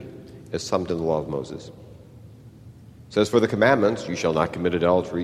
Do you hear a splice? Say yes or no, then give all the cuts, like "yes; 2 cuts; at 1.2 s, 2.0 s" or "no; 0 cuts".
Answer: no; 0 cuts